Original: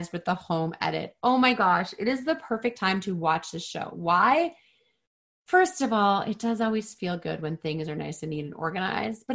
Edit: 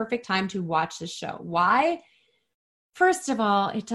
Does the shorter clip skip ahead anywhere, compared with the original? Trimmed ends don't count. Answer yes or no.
no